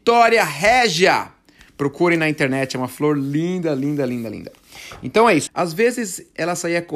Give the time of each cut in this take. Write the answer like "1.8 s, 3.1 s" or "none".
5.5 s

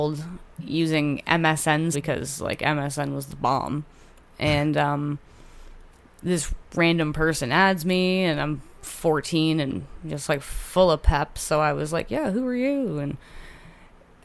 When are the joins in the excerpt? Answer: 1.9 s

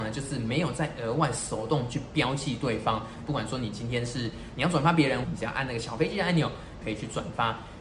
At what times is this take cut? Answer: 3.3 s, 5.2 s, 6.8 s

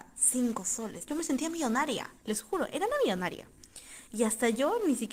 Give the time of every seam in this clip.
1.1 s, 2.2 s

